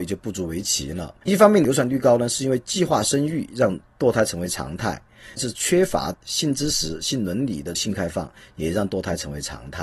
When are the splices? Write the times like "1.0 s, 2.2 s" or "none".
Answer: 5.4 s